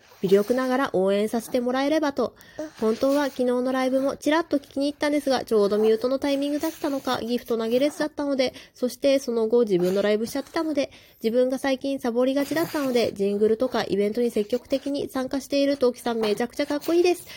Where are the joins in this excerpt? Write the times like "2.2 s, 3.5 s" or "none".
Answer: none